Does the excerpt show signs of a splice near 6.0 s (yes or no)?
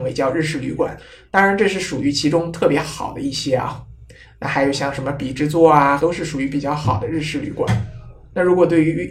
yes